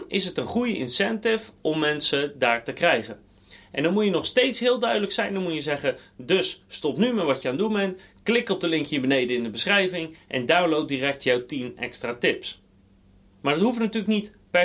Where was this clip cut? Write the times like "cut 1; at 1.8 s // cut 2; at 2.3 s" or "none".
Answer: none